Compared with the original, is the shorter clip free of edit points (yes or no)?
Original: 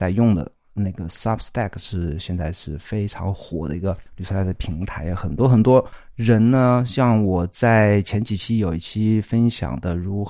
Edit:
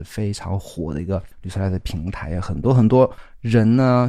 yes